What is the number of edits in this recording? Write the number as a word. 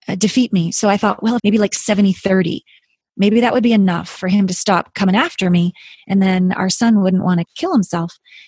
one